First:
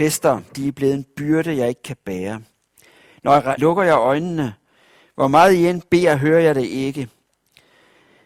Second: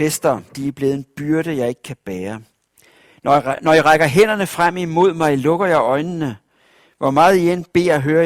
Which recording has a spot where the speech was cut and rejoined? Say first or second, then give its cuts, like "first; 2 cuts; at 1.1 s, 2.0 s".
first; 1 cut; at 3.6 s